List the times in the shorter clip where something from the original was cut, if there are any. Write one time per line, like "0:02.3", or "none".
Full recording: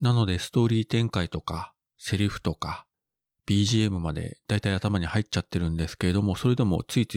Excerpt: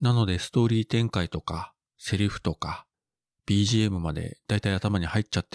none

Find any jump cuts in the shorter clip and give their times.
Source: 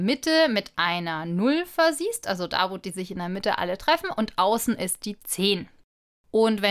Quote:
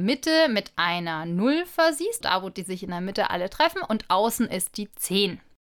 0:02.2

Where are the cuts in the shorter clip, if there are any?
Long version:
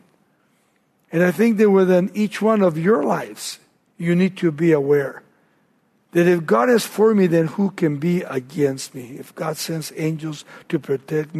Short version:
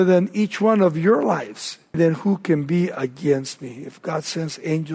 0:01.9

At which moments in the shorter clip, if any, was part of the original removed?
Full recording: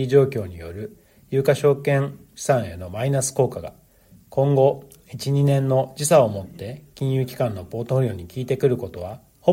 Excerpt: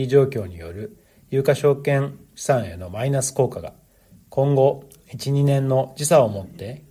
none

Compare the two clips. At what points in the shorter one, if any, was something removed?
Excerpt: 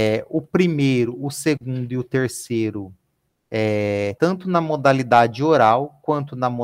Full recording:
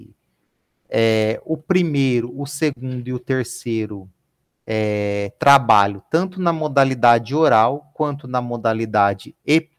0:04.2

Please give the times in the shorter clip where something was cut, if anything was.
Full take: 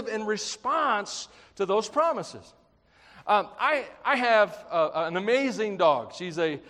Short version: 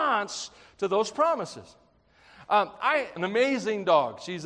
0:03.2

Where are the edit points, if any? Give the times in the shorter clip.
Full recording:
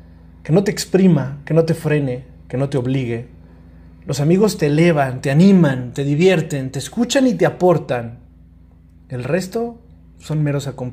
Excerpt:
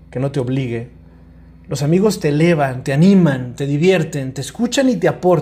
none

